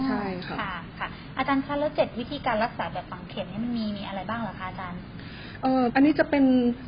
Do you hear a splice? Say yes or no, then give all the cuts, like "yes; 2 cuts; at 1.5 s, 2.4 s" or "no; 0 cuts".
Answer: yes; 1 cut; at 5.9 s